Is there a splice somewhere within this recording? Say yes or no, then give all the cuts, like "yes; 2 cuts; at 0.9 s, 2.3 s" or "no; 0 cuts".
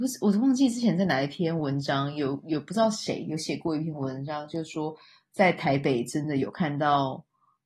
no; 0 cuts